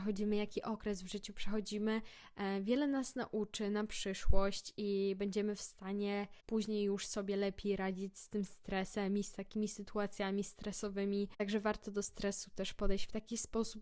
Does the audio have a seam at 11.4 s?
yes; 1 cut; at 11.4 s

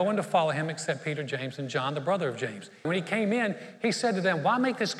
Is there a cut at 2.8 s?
yes; 1 cut; at 2.8 s

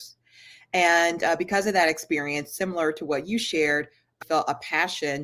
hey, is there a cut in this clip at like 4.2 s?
yes; 1 cut; at 4.2 s

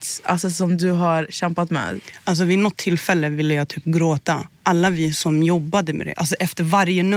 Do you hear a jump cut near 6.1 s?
yes; 1 cut; at 6.1 s

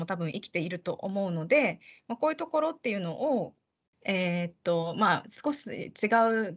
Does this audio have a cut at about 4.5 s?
no; 0 cuts

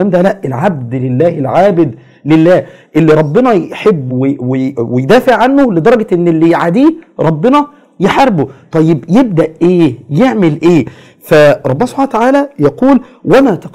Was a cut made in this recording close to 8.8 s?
no; 1 cut; at 4.1 s

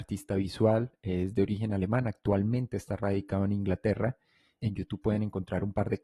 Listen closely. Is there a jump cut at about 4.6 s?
yes; 1 cut; at 4.6 s

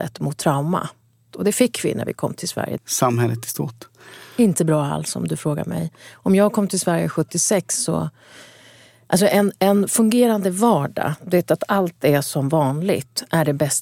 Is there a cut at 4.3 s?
no; 1 cut; at 2.8 s

